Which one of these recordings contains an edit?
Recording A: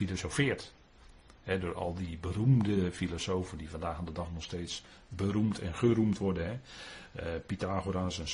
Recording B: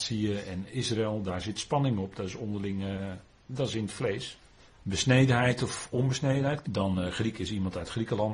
B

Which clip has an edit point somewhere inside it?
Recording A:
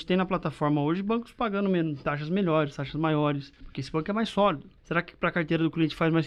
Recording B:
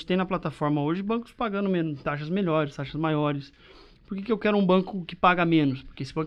A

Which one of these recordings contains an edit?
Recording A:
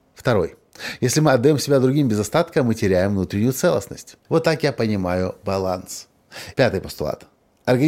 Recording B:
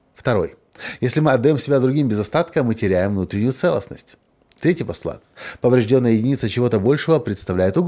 A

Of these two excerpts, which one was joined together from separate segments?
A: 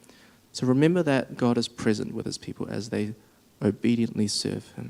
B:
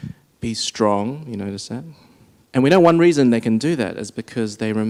B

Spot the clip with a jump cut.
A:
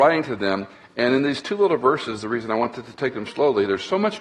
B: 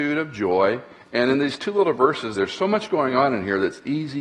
B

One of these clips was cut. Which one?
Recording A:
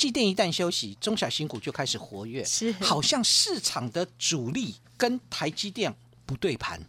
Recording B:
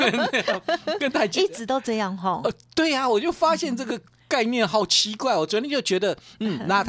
A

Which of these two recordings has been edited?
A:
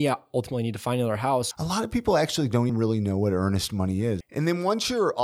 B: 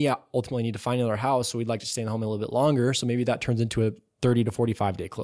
A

